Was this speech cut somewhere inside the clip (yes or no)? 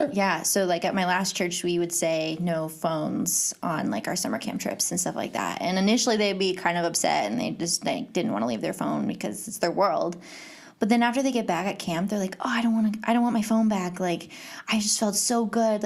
no